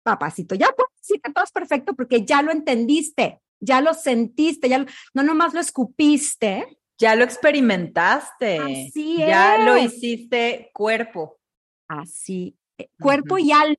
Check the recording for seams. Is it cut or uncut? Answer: cut